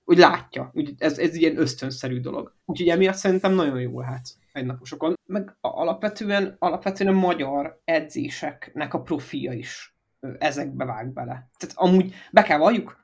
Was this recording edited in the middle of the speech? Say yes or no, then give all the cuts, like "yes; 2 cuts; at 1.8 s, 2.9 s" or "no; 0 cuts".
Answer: yes; 2 cuts; at 2.6 s, 5.2 s